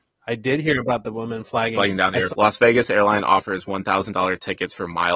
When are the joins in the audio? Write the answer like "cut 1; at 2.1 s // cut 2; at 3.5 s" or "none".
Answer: cut 1; at 2.3 s